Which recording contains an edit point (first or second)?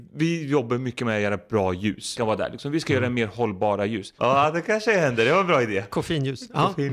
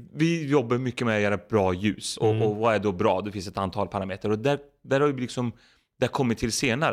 first